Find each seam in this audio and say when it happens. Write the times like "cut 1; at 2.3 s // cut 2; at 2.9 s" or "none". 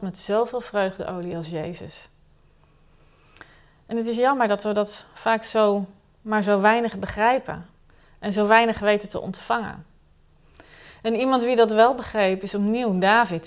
none